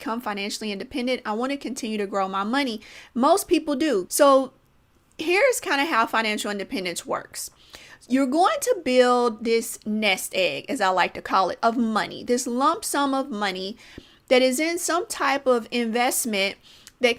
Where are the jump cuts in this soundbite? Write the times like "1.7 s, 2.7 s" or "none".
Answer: 4.1 s